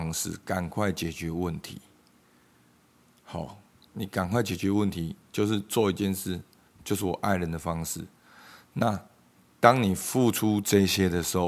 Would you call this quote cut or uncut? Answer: cut